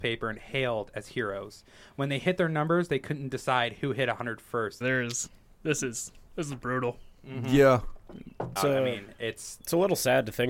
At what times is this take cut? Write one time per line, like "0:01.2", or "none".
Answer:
0:04.8
0:08.6